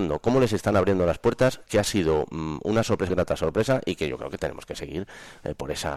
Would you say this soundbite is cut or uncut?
cut